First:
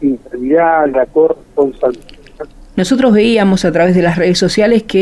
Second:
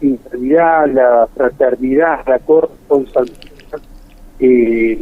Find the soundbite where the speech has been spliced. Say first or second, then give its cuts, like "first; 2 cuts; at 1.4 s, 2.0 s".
first; 2 cuts; at 0.9 s, 2.7 s